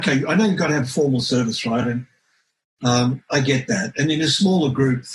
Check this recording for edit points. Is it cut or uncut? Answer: uncut